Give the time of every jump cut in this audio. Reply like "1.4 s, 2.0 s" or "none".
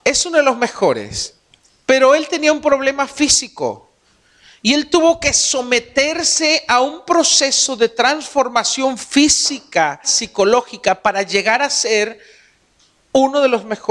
10.0 s